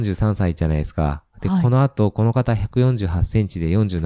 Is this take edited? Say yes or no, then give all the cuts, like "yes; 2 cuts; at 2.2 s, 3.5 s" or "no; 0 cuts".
no; 0 cuts